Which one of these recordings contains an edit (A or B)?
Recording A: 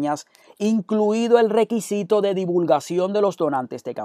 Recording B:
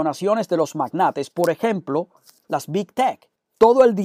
B